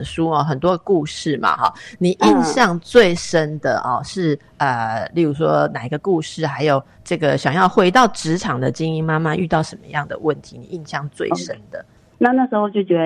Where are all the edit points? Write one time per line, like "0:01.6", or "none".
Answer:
0:06.9
0:12.1